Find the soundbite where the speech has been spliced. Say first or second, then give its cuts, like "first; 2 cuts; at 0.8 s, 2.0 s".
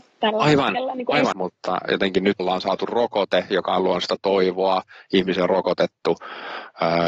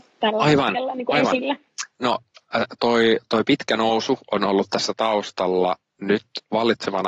first; 2 cuts; at 1.3 s, 2.4 s